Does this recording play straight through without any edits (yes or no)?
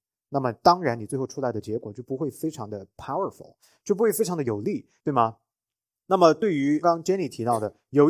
no